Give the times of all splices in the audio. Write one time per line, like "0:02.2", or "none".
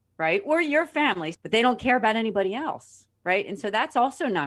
0:01.3
0:03.2